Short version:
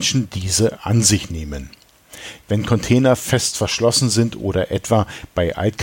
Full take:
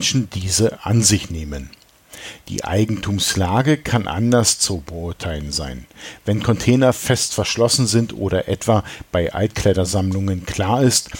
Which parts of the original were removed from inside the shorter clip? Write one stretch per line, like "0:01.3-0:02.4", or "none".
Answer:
0:02.4-0:06.2